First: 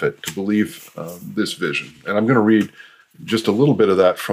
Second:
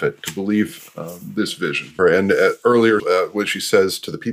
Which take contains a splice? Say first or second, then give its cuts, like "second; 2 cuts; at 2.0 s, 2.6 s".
second; 2 cuts; at 2.0 s, 3.0 s